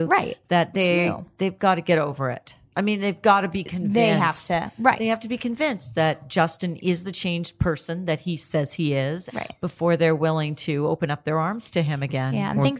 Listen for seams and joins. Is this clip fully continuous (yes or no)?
no